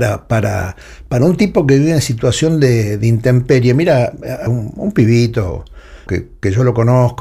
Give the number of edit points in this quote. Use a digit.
2